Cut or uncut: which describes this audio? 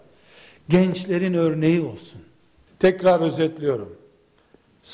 cut